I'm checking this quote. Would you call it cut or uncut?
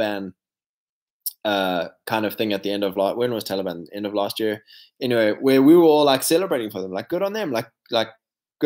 uncut